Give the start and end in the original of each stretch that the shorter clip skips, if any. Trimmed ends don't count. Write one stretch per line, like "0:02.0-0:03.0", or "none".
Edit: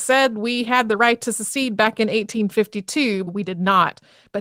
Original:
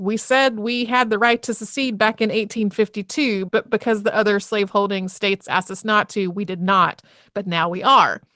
0:03.5-0:06.3